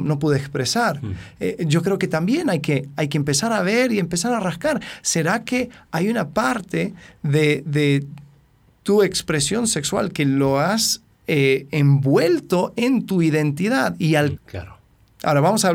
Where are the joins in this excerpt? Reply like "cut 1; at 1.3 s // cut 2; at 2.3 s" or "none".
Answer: cut 1; at 14.4 s